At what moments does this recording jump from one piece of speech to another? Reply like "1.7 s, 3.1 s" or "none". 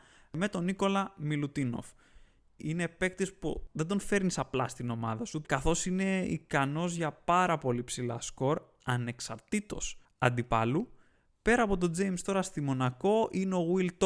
2.6 s, 5.4 s